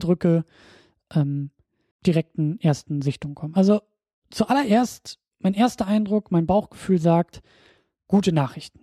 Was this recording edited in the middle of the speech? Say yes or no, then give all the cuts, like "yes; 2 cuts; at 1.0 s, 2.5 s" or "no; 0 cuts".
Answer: yes; 1 cut; at 1.9 s